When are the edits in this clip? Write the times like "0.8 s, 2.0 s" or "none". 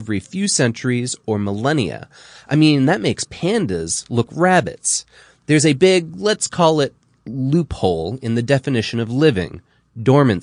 4.3 s